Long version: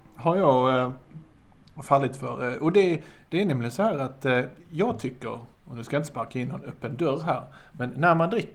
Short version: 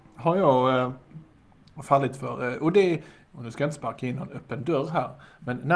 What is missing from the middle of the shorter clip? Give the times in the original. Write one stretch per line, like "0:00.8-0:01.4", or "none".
0:03.3-0:05.6